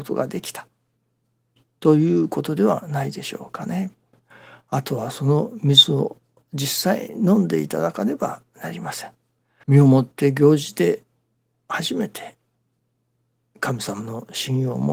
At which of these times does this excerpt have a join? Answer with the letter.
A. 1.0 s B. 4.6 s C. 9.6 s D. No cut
C